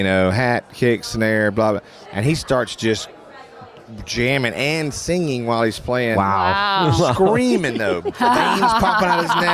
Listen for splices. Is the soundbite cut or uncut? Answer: uncut